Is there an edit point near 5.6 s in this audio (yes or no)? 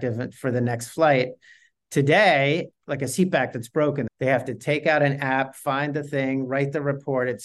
no